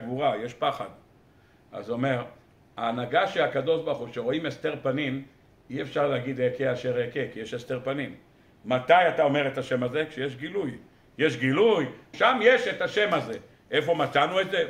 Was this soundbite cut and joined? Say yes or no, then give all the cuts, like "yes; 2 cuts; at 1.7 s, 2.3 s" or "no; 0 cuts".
yes; 1 cut; at 12.1 s